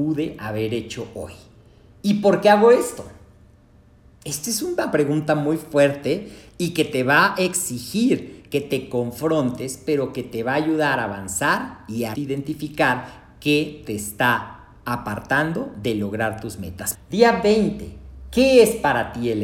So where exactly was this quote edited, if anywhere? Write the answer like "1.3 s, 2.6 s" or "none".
12.1 s, 16.9 s